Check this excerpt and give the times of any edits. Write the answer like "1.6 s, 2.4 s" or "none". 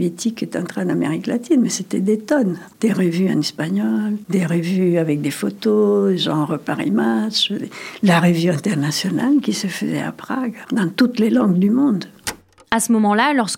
none